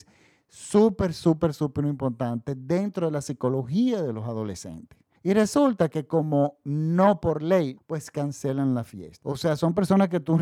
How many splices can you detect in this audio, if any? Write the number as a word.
three